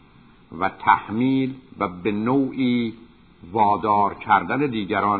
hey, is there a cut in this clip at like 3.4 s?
no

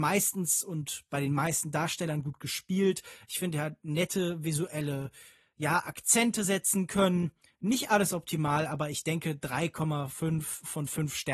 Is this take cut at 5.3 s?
no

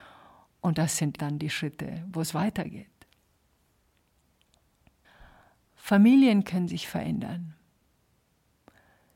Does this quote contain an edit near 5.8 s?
no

